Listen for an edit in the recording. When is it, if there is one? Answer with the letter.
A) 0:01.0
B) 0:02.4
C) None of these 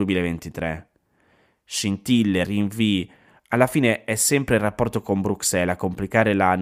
B